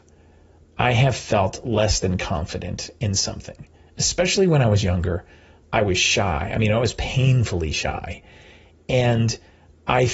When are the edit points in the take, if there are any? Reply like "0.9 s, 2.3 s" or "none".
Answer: none